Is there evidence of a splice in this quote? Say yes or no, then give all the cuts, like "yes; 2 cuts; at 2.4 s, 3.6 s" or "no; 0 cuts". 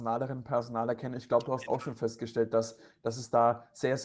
no; 0 cuts